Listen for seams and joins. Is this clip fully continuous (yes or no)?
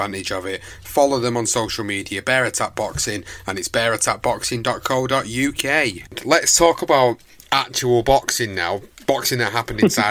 yes